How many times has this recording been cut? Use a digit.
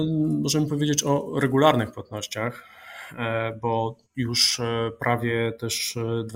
1